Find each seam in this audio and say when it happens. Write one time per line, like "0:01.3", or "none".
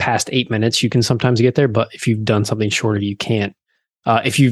none